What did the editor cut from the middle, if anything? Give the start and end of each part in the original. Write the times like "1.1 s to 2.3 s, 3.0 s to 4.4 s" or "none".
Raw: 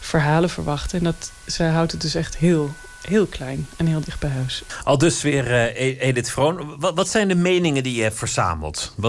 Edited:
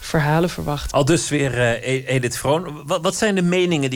0.9 s to 4.8 s